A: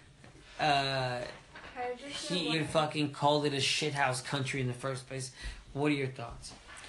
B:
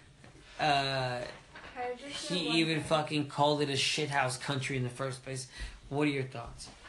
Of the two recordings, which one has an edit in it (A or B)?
A